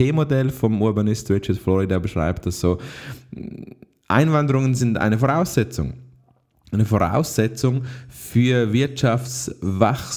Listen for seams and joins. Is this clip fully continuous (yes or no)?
yes